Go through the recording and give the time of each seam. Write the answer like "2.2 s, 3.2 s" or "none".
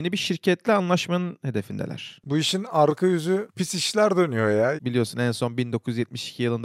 2.2 s, 4.8 s